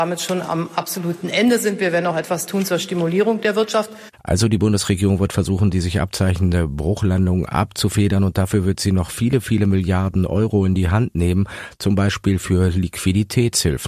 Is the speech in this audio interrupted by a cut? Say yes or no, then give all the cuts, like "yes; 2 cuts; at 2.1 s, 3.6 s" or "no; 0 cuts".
no; 0 cuts